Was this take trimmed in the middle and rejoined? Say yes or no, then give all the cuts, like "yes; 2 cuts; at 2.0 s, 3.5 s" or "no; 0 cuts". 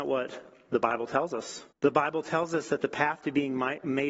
yes; 1 cut; at 1.7 s